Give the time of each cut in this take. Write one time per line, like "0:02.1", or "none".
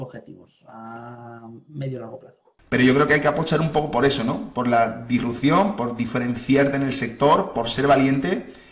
0:02.6